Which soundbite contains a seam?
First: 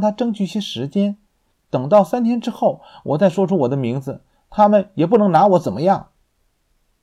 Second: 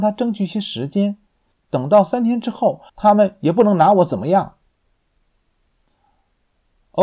second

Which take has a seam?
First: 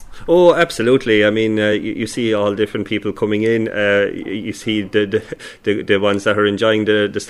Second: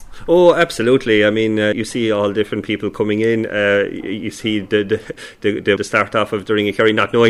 second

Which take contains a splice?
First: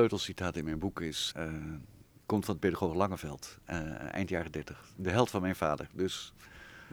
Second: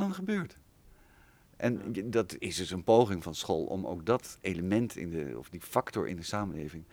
first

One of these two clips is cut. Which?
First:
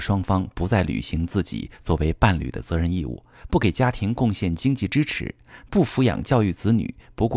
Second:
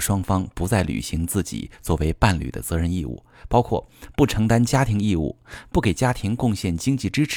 first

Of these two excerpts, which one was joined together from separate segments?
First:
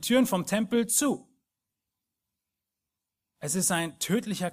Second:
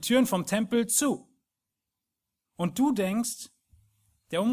second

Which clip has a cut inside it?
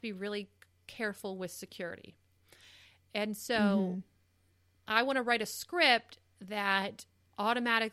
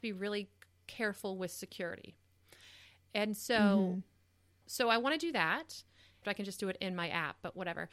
second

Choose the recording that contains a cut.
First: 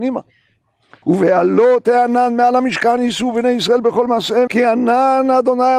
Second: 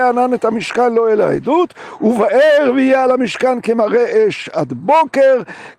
first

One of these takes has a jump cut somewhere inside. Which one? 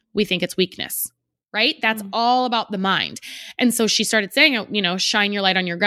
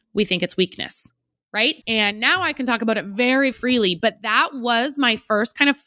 second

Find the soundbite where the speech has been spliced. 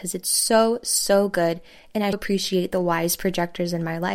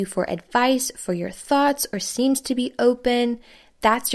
first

